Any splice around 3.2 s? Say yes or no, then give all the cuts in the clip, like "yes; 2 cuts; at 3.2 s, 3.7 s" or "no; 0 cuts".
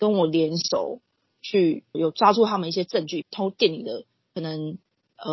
yes; 2 cuts; at 1.9 s, 3.2 s